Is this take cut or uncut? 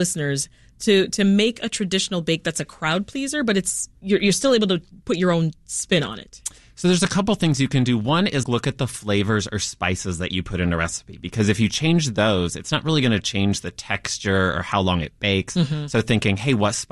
cut